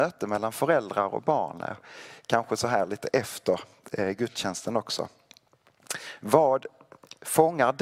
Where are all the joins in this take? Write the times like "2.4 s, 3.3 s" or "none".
none